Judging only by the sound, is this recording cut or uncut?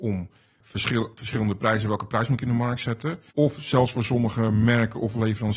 cut